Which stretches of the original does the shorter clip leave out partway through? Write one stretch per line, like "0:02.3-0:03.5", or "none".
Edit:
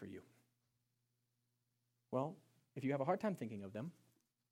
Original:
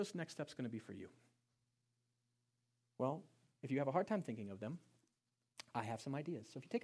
none